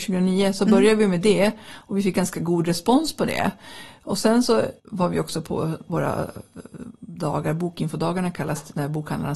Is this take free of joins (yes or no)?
no